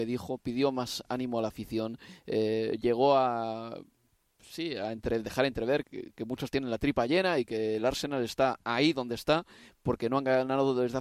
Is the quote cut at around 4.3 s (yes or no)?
no